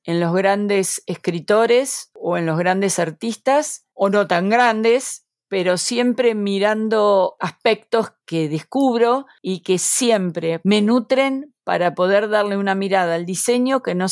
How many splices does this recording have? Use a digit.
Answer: 1